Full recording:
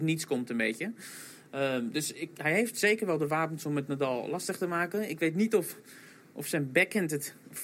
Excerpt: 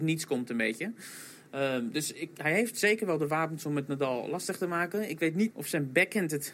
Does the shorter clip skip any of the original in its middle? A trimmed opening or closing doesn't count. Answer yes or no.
yes